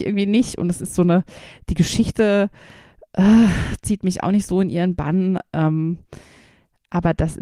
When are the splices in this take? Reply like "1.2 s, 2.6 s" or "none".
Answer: none